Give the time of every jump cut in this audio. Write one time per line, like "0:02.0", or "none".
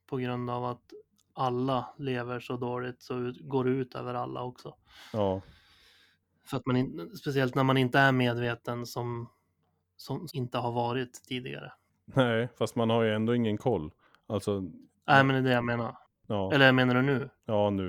0:10.3